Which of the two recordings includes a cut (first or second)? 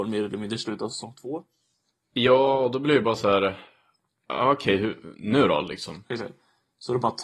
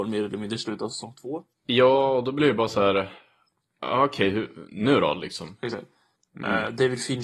second